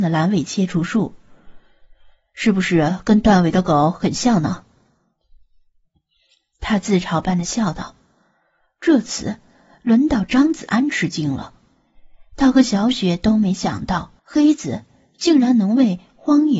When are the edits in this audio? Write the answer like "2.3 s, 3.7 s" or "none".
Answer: 14.2 s